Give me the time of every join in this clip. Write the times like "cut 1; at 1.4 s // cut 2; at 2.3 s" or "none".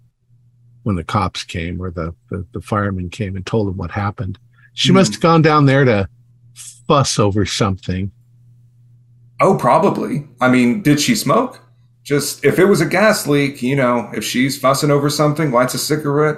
none